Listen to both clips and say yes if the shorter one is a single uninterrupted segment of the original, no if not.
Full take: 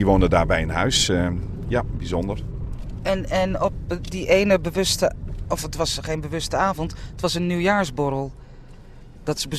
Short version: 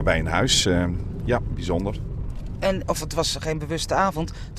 no